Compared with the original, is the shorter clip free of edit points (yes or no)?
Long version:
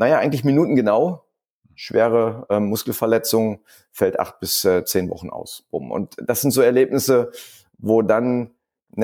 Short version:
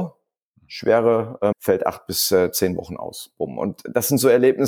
no